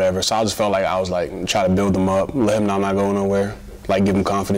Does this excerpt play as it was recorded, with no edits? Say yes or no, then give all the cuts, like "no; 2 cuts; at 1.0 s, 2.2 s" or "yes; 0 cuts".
yes; 0 cuts